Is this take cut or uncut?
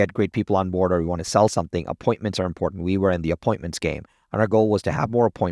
uncut